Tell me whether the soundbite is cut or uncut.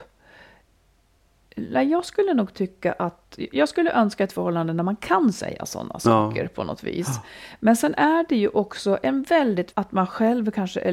cut